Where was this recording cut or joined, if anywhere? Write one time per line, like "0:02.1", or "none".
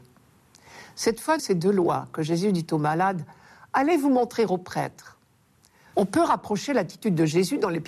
0:01.4
0:05.9